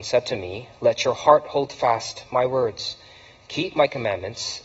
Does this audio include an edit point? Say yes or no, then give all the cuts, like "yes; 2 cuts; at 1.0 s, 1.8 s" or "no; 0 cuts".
no; 0 cuts